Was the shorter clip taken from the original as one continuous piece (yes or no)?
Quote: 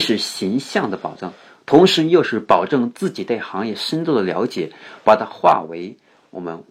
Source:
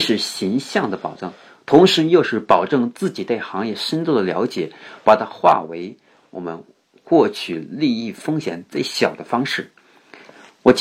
yes